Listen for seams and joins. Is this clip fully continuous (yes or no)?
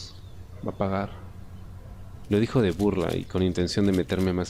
no